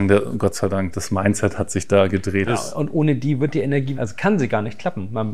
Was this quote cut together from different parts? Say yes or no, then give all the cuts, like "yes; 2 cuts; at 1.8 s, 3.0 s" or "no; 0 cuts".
yes; 3 cuts; at 0.9 s, 2.5 s, 4.0 s